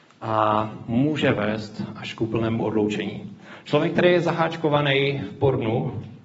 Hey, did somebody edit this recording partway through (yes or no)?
no